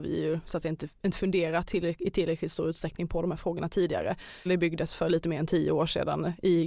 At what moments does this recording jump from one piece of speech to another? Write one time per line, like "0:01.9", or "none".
0:04.5